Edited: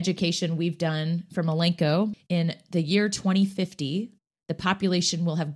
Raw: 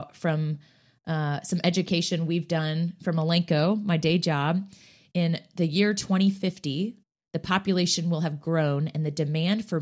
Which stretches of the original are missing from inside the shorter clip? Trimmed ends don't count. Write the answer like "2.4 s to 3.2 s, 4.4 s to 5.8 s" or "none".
3.8 s to 5.0 s